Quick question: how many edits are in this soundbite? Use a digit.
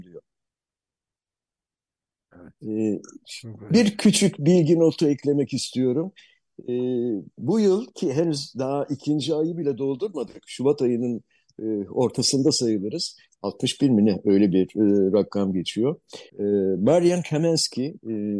2